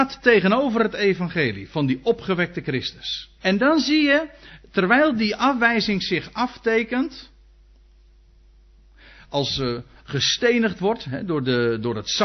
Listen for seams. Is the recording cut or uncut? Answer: cut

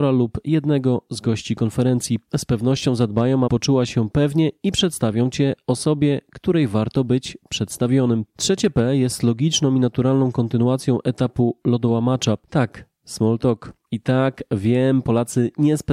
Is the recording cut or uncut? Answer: cut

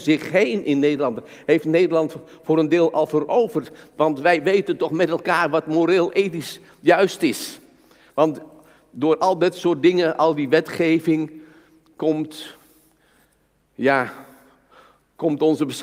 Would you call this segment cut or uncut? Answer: uncut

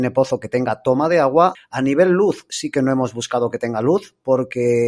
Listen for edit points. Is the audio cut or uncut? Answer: cut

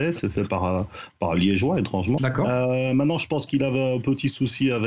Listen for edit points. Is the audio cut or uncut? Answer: cut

